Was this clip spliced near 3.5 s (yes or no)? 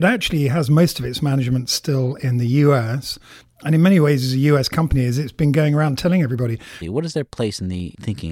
no